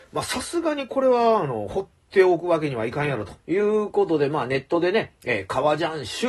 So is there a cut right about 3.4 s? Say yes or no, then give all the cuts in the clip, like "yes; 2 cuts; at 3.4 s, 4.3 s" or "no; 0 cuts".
yes; 1 cut; at 3.4 s